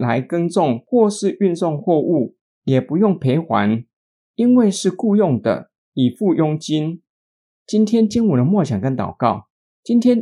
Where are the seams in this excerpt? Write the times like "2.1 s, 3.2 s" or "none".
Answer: none